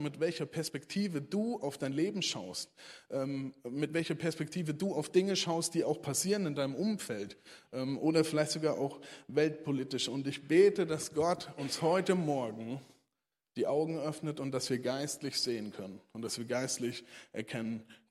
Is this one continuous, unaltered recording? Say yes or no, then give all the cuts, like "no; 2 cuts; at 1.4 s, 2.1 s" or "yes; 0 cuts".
yes; 0 cuts